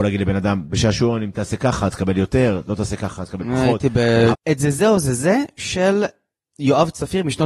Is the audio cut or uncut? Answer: cut